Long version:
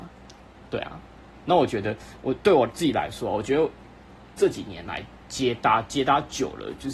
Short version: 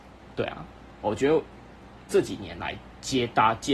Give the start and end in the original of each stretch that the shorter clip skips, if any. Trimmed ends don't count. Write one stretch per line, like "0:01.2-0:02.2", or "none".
0:01.4-0:03.3